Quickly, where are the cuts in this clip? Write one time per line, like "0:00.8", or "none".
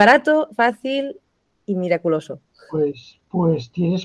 none